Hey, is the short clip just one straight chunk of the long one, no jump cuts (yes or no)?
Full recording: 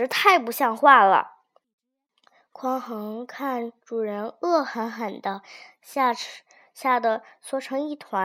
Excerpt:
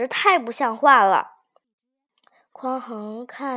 yes